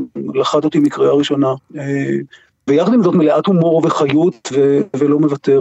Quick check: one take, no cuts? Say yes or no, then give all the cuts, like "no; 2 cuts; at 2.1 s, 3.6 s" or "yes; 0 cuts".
no; 2 cuts; at 2.7 s, 4.5 s